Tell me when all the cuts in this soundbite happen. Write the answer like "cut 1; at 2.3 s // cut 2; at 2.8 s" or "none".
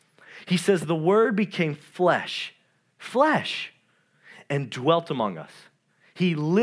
none